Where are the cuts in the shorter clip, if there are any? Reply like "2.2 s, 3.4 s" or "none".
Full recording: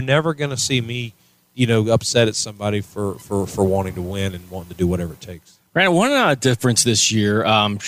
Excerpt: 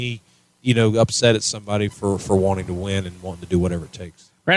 1.9 s